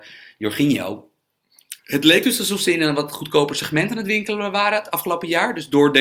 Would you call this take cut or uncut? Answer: cut